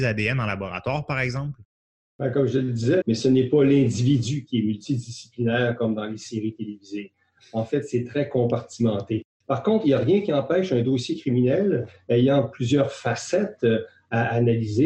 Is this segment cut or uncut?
cut